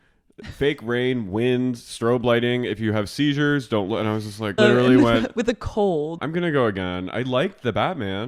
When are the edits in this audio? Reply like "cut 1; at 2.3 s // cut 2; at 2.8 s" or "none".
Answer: cut 1; at 4.6 s // cut 2; at 6.2 s